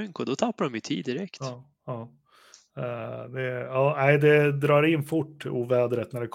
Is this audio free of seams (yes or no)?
yes